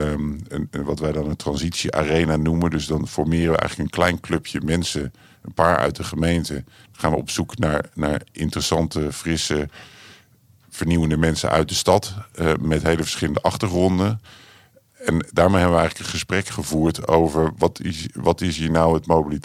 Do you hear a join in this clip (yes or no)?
no